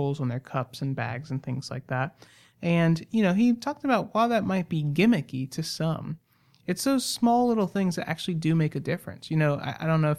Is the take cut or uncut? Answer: uncut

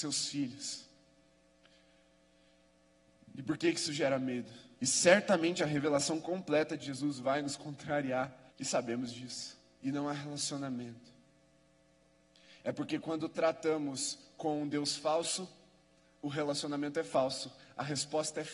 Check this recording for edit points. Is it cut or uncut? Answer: cut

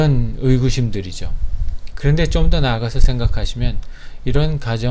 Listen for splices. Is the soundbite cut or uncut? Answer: cut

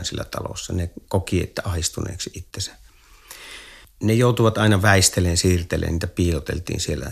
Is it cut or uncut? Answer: uncut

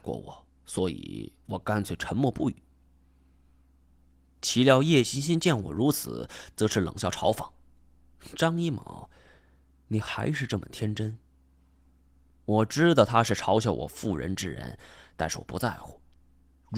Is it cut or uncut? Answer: uncut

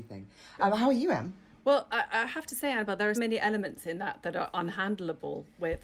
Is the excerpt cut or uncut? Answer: cut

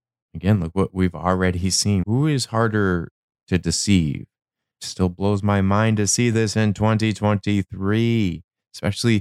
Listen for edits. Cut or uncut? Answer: cut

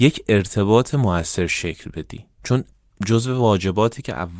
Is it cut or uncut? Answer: cut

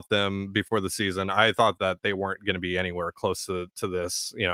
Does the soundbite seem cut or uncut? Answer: uncut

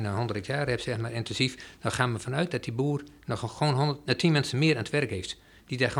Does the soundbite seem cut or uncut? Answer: uncut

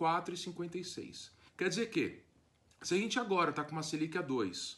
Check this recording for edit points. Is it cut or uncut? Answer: cut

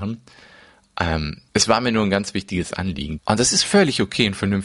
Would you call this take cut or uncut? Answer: cut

